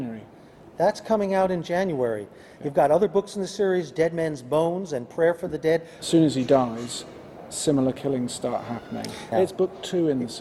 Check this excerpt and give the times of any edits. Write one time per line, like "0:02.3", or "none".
0:06.0
0:09.3

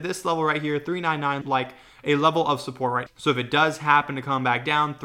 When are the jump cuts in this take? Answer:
0:01.4
0:03.1

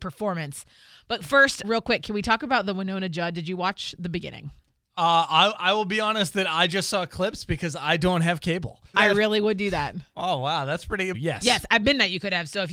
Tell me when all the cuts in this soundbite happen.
0:01.6
0:08.9
0:11.1

